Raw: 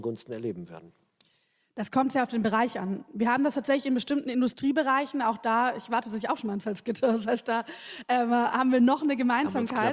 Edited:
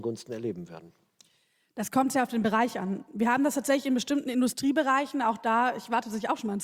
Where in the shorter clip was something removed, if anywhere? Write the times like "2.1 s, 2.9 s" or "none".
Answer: none